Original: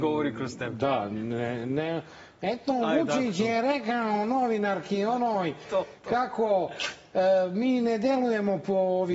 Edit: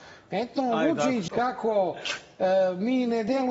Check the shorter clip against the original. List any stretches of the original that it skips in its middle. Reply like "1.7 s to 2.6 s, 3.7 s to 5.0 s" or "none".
3.4 s to 6.0 s